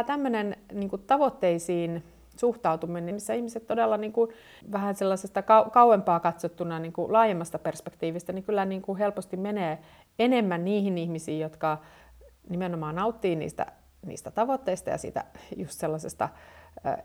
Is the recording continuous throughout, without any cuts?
no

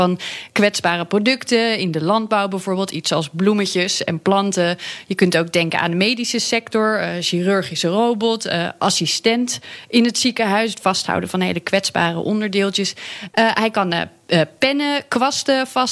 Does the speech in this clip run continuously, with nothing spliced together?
yes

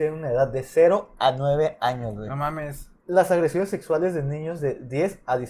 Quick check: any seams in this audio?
yes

